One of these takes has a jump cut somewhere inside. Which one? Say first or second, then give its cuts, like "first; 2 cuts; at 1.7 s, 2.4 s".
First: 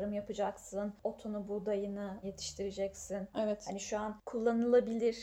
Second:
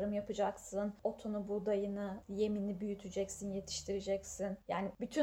first; 2 cuts; at 2.2 s, 3.3 s